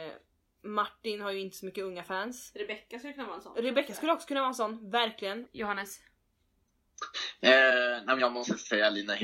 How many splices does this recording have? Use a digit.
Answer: 1